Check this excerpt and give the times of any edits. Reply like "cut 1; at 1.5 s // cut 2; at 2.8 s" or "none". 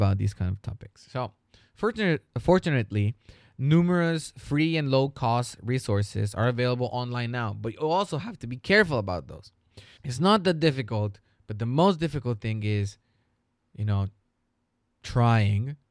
cut 1; at 10.0 s